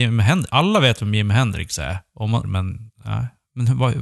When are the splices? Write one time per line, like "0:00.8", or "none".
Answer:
0:02.4